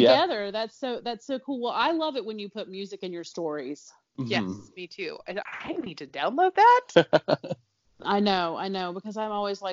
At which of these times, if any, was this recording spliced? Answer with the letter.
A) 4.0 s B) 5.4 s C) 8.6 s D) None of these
B